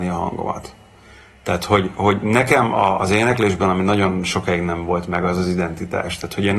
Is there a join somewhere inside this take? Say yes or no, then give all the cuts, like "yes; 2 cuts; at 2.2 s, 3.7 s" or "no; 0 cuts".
no; 0 cuts